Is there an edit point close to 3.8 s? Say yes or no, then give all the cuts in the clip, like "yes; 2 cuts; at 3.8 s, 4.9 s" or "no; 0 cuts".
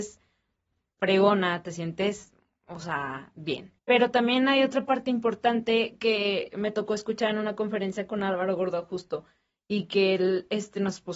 yes; 1 cut; at 3.8 s